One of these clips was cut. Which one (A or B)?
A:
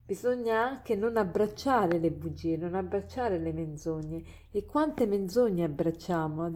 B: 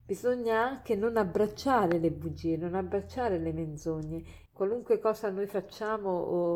B